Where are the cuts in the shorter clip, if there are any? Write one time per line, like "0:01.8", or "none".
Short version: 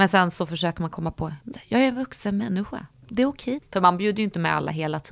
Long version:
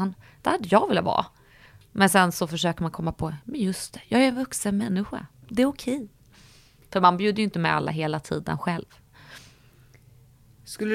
0:01.5
0:03.6